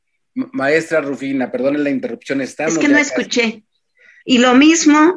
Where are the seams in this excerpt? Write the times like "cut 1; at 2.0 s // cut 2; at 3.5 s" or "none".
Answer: cut 1; at 4.2 s